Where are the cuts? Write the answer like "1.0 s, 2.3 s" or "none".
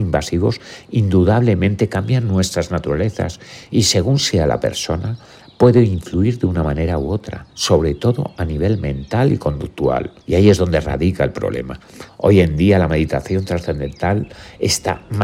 10.2 s, 12.1 s

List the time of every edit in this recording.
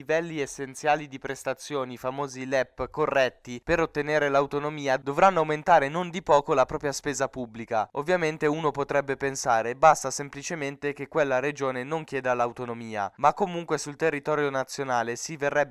7.9 s

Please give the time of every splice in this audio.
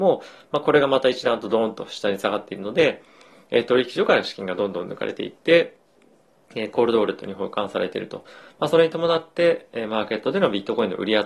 none

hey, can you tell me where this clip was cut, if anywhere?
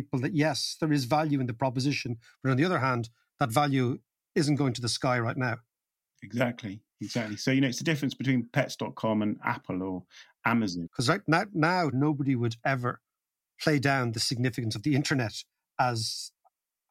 6.9 s, 10.9 s, 11.9 s

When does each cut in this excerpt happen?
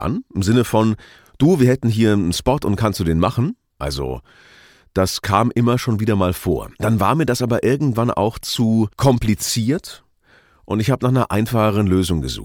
3.7 s, 6.7 s, 8.9 s

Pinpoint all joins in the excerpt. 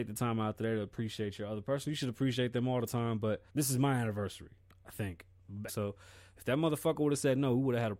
3.5 s, 5.7 s

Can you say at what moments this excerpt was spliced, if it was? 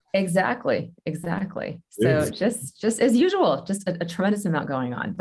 none

